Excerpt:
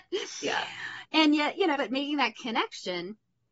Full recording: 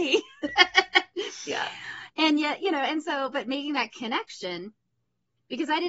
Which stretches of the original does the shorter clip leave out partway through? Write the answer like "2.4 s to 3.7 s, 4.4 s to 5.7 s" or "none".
2.8 s to 3.3 s